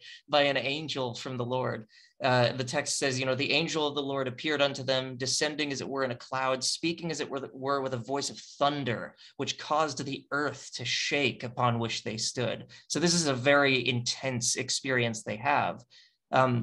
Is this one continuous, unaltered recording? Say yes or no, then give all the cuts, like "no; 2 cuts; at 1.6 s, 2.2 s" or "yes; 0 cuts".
yes; 0 cuts